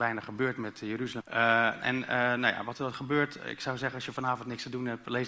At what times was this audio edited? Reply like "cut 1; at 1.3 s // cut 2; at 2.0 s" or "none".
cut 1; at 1.2 s

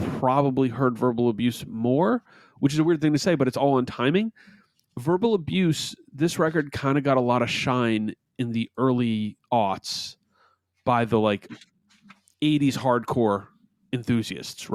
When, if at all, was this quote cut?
none

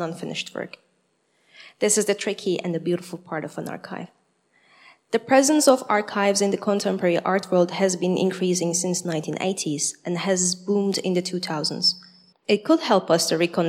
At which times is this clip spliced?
cut 1; at 12.3 s

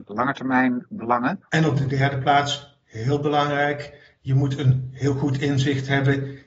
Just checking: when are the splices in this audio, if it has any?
cut 1; at 1.5 s

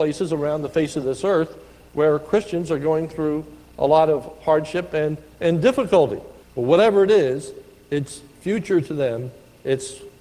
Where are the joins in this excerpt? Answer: cut 1; at 6.4 s

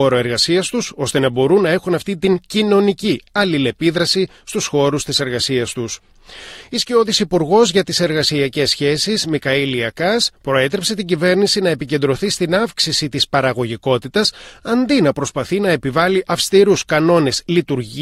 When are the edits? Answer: none

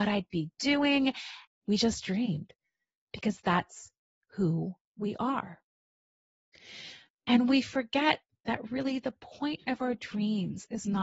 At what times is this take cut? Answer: cut 1; at 1.5 s // cut 2; at 7.1 s

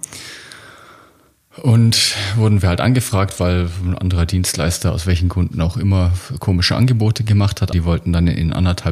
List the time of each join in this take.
cut 1; at 7.7 s

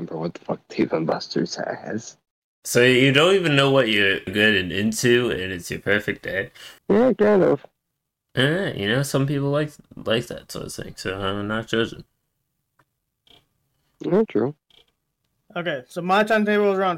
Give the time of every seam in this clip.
cut 1; at 4.3 s // cut 2; at 6.8 s // cut 3; at 14.3 s

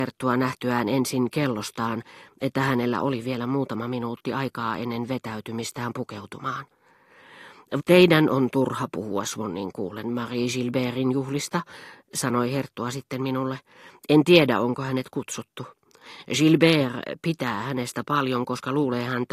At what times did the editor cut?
cut 1; at 7.8 s

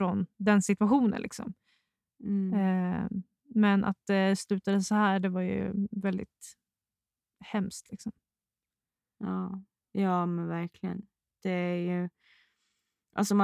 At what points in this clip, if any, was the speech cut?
none

